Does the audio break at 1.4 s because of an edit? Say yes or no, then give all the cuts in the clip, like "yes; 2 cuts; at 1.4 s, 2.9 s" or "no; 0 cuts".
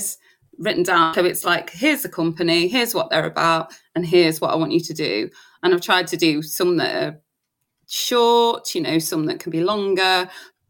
no; 0 cuts